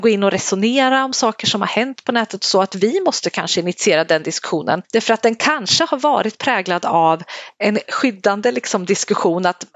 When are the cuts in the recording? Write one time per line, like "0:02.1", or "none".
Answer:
0:07.8